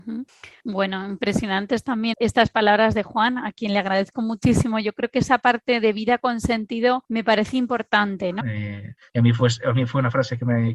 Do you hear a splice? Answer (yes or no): yes